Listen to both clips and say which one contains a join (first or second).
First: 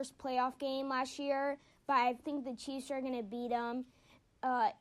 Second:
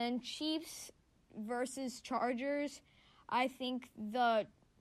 first